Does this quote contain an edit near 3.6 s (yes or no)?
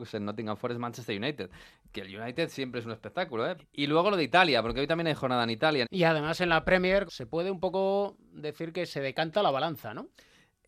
yes